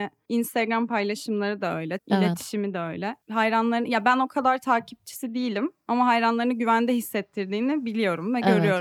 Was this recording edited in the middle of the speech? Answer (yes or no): yes